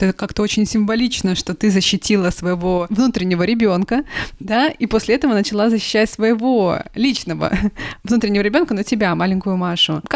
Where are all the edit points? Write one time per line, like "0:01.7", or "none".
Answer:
none